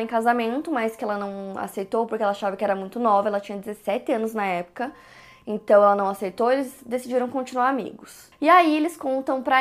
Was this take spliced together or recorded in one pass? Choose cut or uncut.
cut